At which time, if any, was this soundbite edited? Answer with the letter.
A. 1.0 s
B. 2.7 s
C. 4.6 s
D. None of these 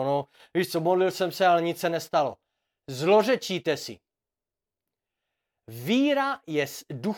D